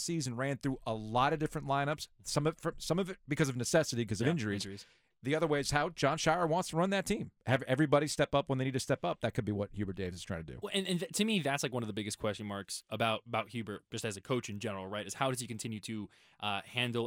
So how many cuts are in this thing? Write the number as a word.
one